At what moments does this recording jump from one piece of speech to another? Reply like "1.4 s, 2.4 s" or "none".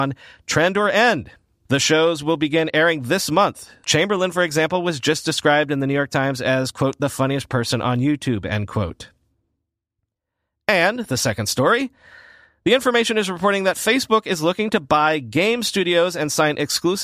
1.7 s, 3.8 s